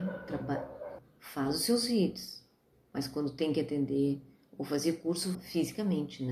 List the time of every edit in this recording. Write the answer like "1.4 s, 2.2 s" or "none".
1.0 s, 5.3 s